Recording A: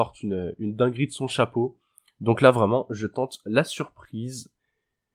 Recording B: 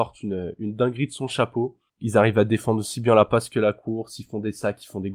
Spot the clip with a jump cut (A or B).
B